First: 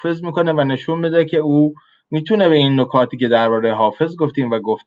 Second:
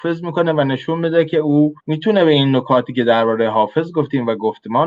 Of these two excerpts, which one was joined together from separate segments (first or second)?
second